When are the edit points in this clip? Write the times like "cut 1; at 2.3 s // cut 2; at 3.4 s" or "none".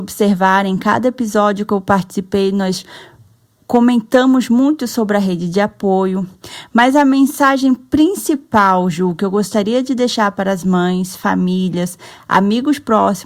none